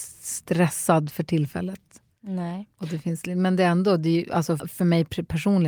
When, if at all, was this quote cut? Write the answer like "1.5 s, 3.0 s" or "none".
4.6 s